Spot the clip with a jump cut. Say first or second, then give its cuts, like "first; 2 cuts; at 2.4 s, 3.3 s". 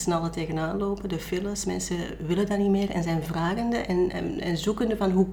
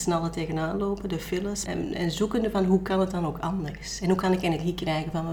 second; 1 cut; at 1.7 s